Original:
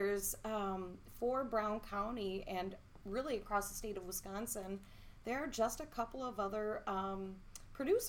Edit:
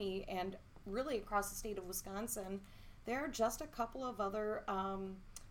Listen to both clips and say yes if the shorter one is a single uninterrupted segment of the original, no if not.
yes